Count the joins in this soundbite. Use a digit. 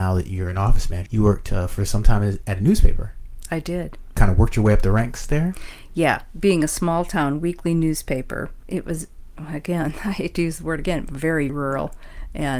2